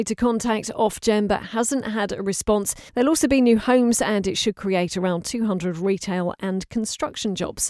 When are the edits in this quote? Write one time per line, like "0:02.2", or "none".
0:02.9